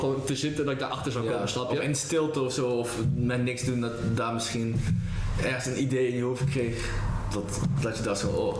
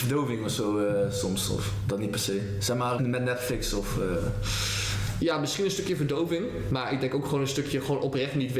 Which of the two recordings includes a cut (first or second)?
second